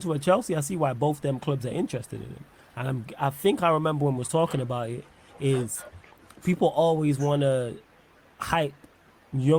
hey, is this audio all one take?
yes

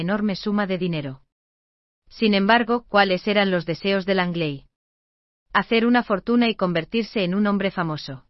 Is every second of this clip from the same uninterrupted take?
yes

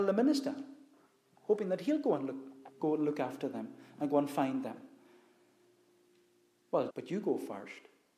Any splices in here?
yes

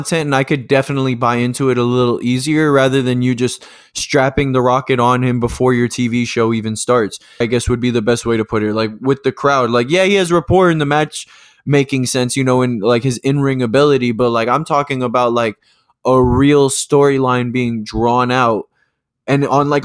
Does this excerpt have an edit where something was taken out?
yes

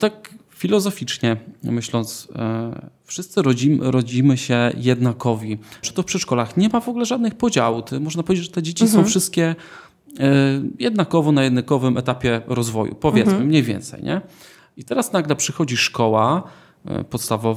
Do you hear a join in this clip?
yes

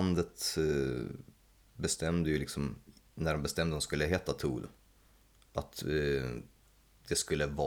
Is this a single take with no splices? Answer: yes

